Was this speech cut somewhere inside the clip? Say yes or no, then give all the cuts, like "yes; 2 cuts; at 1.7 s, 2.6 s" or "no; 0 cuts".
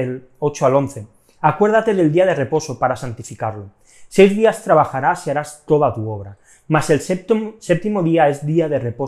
no; 0 cuts